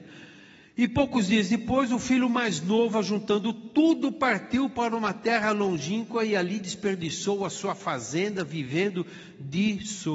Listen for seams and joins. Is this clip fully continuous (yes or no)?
yes